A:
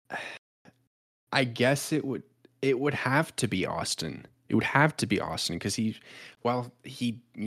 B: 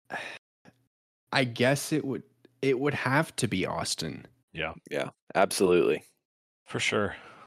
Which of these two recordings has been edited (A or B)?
B